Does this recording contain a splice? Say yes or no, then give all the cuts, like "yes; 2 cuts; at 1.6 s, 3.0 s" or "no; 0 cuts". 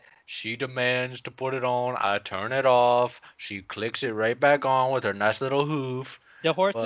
no; 0 cuts